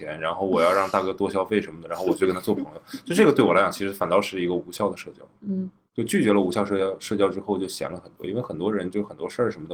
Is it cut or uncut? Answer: uncut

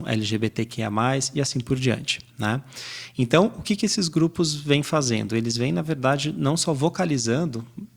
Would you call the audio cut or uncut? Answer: uncut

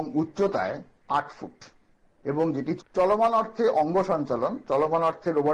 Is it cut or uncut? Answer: cut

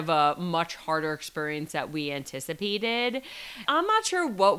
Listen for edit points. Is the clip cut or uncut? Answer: cut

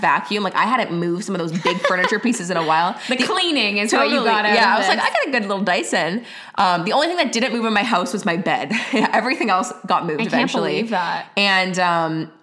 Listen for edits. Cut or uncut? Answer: uncut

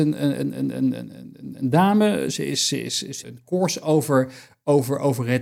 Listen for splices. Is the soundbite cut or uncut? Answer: cut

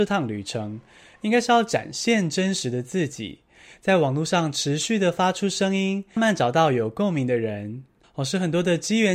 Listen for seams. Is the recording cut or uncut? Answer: cut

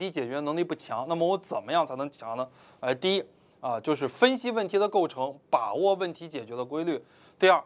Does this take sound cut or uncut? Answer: uncut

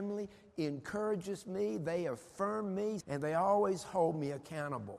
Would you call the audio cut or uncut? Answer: cut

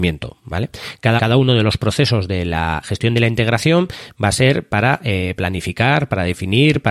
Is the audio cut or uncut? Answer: cut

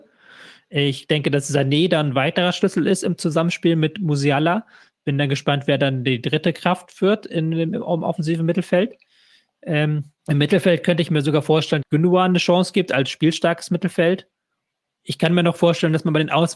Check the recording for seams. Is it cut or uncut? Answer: cut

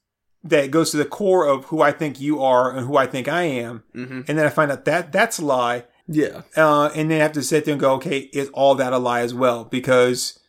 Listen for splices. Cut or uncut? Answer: cut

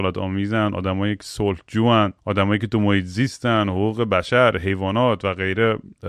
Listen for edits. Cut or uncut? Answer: cut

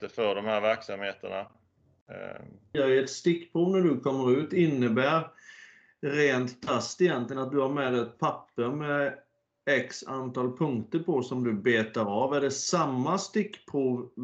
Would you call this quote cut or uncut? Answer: cut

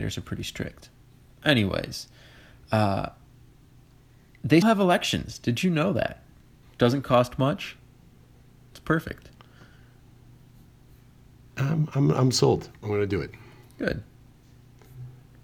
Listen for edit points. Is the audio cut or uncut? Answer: cut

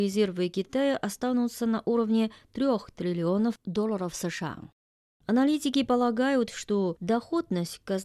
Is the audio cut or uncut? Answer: uncut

